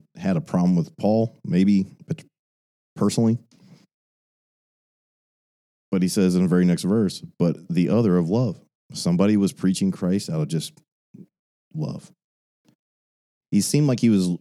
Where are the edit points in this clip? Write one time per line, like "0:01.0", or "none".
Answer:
0:13.4